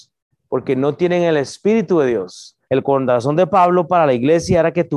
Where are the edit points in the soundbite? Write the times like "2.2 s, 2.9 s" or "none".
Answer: 2.7 s